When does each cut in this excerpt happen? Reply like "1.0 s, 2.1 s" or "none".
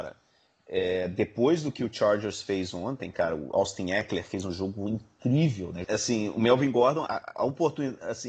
5.8 s, 7.1 s